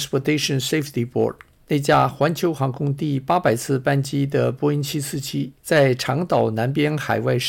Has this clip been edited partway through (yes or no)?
yes